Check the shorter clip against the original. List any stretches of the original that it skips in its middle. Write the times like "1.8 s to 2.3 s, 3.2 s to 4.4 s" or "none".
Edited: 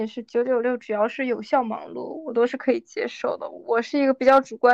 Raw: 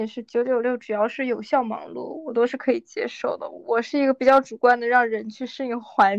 none